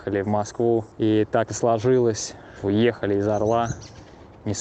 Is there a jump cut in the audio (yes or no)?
yes